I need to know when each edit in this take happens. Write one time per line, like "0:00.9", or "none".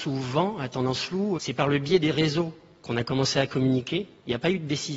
0:01.4